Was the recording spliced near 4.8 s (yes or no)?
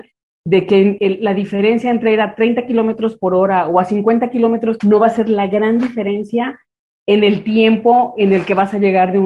yes